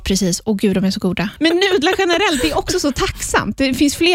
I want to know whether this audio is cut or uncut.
cut